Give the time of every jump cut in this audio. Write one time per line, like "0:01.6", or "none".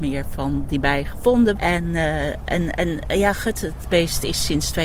0:01.5